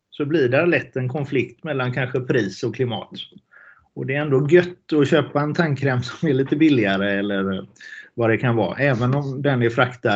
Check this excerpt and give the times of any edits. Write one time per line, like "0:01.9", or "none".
none